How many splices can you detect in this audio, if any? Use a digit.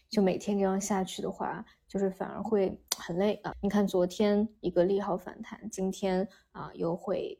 1